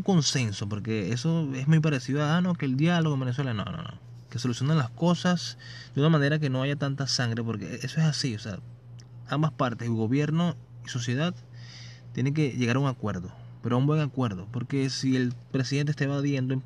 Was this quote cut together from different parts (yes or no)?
no